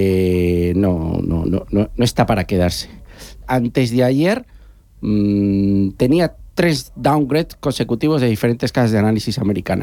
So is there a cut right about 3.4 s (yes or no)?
yes